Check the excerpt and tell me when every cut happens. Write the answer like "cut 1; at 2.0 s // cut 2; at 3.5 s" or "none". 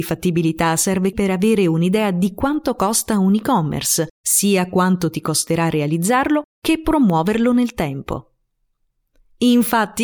cut 1; at 1.1 s // cut 2; at 4.1 s // cut 3; at 6.5 s